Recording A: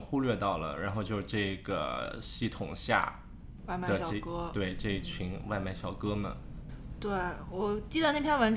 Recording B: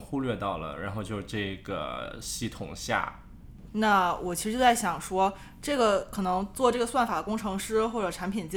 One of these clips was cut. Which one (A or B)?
B